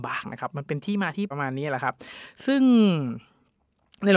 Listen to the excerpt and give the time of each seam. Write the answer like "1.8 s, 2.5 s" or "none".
1.3 s